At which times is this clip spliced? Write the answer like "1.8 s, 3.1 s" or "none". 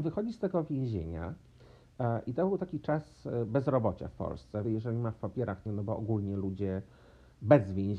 4.6 s, 5.7 s